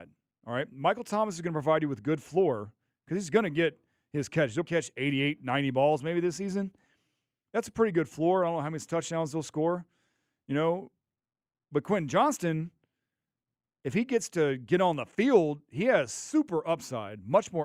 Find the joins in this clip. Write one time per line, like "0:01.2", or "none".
0:04.6